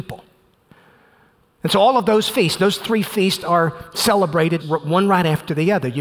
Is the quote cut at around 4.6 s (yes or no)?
yes